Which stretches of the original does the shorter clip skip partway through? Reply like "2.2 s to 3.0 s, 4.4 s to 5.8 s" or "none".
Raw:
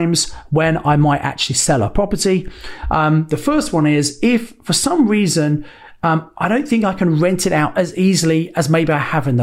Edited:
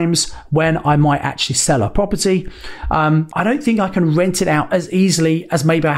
3.3 s to 6.3 s

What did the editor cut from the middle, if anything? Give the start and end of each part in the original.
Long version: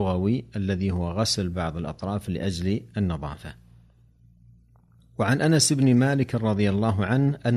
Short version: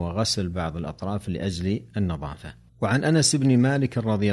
3.7 s to 5.1 s

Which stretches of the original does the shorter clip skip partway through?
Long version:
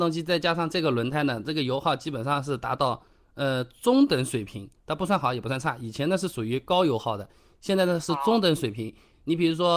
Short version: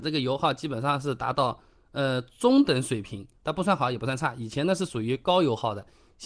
none

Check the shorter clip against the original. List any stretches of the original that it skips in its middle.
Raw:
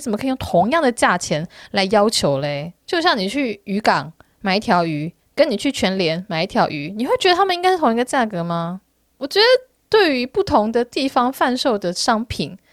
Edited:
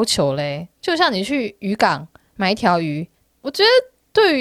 5.3 s to 9.0 s

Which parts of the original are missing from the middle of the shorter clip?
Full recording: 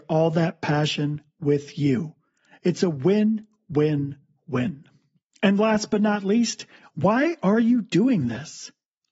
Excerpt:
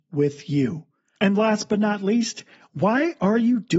2.4 s to 5.4 s

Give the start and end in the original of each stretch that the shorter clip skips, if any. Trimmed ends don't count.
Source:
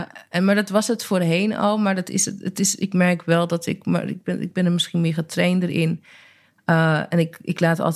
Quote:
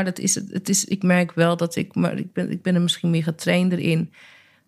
none

